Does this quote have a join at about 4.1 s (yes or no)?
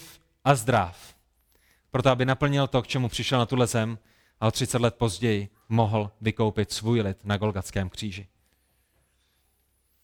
no